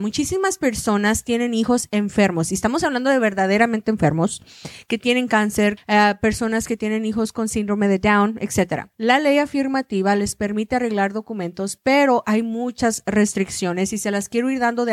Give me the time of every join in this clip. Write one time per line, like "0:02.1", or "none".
0:05.8
0:08.9